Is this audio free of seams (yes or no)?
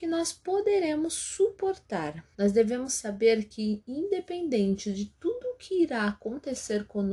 no